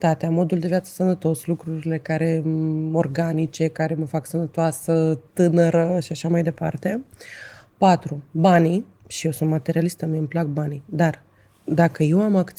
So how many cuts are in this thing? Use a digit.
0